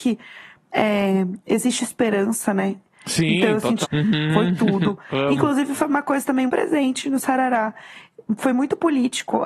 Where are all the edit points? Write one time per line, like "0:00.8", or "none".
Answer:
0:03.8
0:06.5